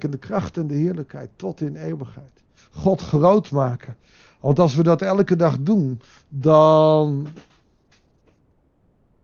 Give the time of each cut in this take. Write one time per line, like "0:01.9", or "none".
0:02.6